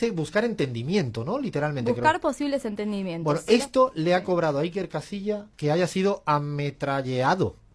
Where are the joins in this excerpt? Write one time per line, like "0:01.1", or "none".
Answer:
0:05.5